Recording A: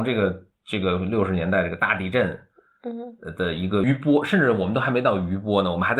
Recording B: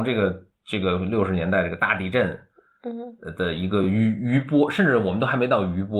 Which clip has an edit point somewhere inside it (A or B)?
A